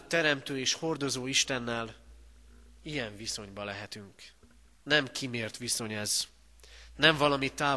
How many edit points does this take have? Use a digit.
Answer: 1